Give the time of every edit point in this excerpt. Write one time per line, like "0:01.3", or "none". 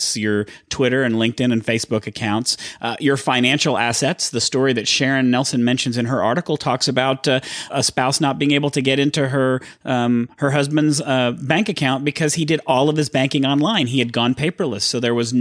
0:07.7